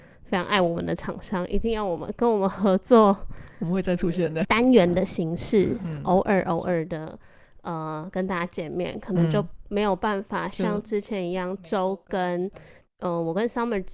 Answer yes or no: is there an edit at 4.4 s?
yes